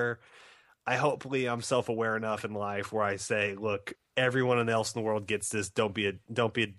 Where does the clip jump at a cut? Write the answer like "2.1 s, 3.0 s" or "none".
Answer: none